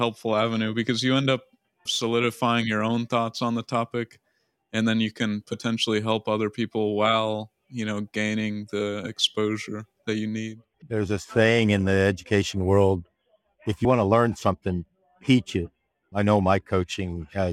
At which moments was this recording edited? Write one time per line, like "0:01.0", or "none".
0:10.7
0:13.8
0:16.0